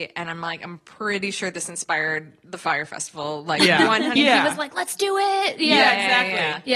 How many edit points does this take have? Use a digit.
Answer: 1